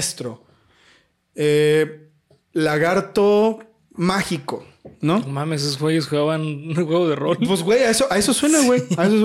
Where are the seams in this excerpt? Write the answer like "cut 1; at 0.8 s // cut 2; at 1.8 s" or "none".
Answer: none